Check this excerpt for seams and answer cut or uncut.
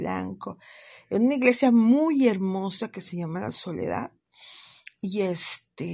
uncut